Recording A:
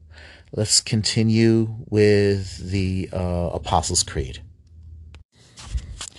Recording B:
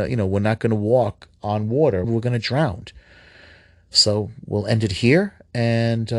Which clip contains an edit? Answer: B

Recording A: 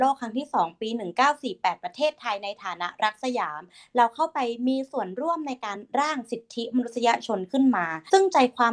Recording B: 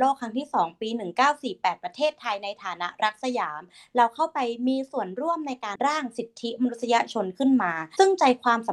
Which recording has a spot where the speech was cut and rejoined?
B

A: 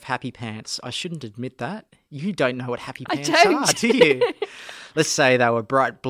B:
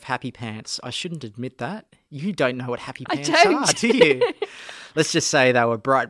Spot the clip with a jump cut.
A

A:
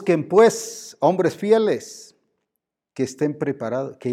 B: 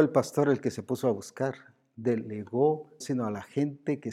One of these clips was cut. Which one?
B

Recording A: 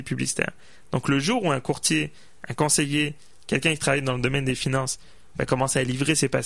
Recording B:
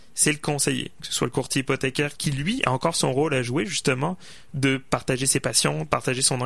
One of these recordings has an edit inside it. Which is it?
B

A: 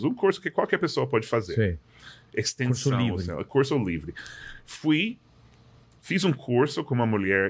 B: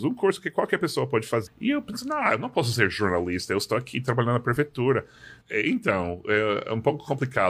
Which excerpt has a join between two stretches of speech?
B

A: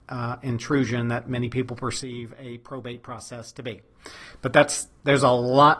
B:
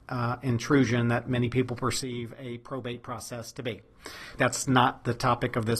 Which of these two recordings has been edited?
B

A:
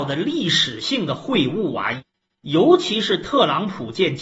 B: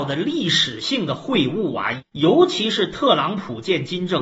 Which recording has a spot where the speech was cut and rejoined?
B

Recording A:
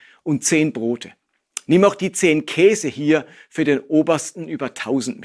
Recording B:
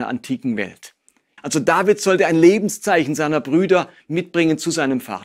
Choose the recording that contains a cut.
B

